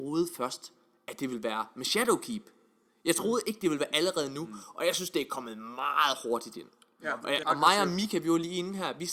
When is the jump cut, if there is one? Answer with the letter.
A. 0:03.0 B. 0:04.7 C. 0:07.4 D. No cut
C